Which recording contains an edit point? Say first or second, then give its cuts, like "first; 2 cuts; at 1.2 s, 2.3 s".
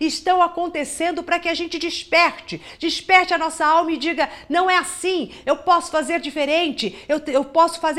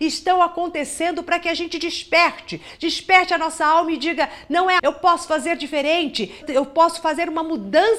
second; 2 cuts; at 4.8 s, 6.4 s